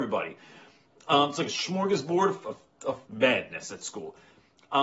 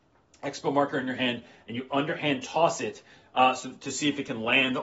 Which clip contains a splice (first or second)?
first